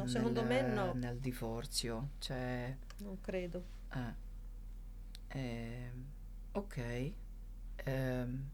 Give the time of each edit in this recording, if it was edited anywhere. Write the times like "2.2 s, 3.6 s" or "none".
none